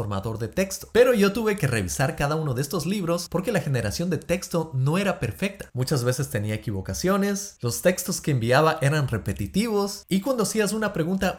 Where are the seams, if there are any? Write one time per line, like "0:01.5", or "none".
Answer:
0:00.9